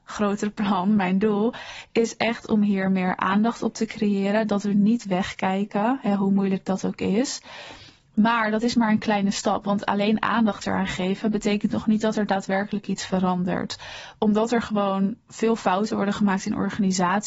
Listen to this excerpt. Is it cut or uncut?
uncut